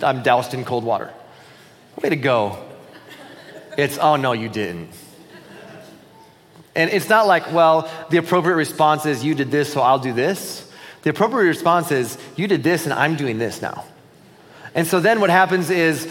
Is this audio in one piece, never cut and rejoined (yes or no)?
no